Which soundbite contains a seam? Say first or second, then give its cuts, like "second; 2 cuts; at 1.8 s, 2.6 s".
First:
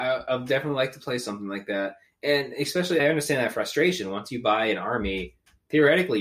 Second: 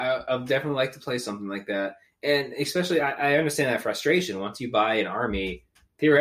first; 1 cut; at 3.0 s